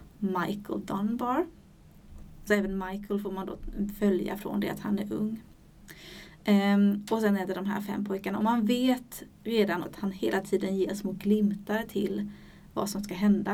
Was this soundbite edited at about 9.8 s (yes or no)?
yes